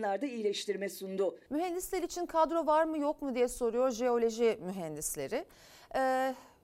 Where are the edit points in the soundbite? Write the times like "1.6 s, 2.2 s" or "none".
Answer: 1.5 s